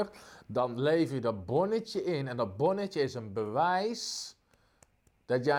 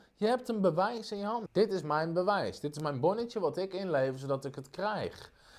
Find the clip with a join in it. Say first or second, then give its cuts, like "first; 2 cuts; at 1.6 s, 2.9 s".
second; 1 cut; at 1.5 s